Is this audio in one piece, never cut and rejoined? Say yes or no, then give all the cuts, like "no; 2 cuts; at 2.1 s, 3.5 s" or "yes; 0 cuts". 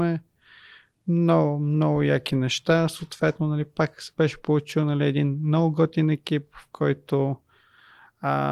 yes; 0 cuts